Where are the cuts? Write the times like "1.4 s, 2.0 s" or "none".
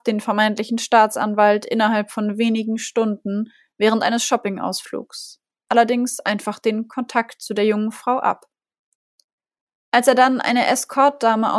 5.7 s